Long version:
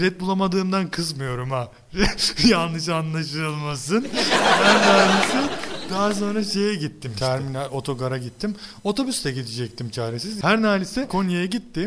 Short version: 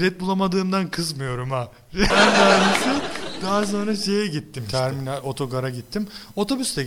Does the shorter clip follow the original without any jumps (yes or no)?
no